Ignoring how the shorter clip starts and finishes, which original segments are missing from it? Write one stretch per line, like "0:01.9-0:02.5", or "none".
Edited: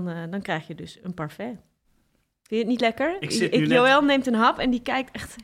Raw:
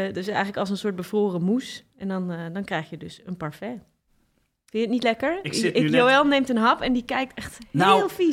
none